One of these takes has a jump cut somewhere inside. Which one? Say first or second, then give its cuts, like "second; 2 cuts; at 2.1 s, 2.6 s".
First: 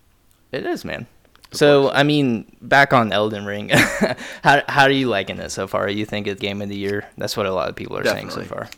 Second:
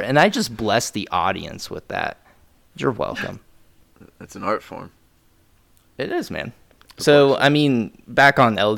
first; 1 cut; at 6.4 s